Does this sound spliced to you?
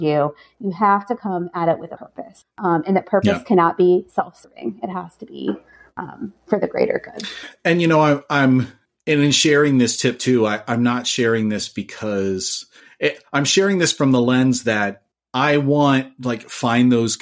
no; 0 cuts

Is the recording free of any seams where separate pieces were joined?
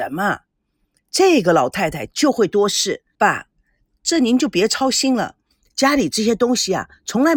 no; 1 cut; at 3.1 s

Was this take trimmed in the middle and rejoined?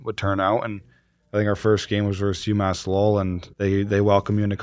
yes; 1 cut; at 3.5 s

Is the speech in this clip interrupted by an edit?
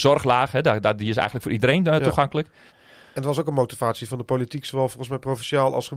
yes; 1 cut; at 2.7 s

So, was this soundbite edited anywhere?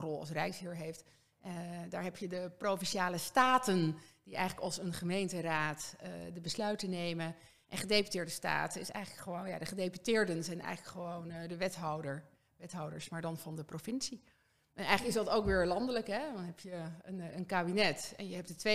no; 0 cuts

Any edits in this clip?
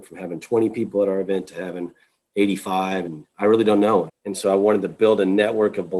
yes; 2 cuts; at 3.1 s, 4.1 s

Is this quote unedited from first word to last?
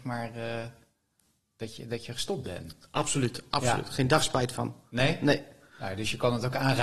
yes; 0 cuts

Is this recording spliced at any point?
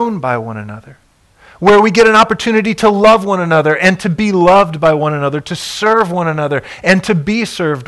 no; 0 cuts

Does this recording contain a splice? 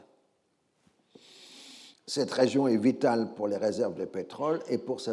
yes; 1 cut; at 1.9 s

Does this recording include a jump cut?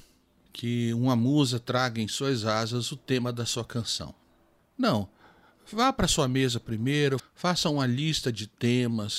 yes; 1 cut; at 7.2 s

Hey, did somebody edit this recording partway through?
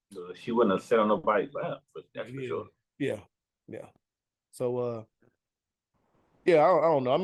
no; 0 cuts

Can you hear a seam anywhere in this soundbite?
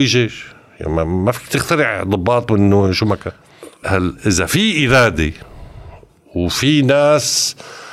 yes; 1 cut; at 3.8 s

